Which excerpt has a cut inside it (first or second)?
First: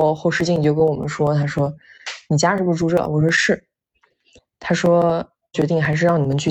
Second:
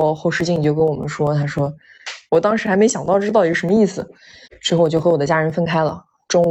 second